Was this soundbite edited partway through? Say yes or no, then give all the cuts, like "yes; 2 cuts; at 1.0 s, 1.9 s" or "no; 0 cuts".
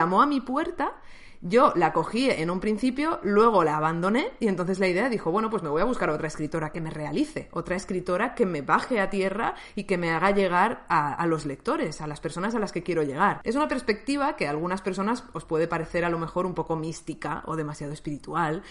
yes; 1 cut; at 13.4 s